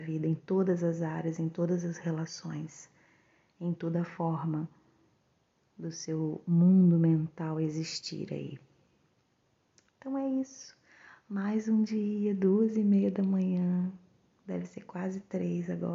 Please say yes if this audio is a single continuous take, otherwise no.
yes